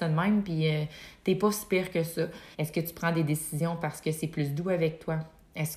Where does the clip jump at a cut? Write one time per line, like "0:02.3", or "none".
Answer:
0:02.5